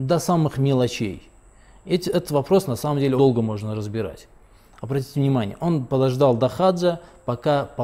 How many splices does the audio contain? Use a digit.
1